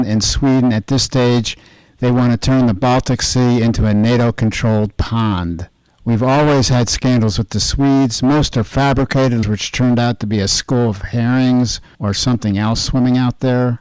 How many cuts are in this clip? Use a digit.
1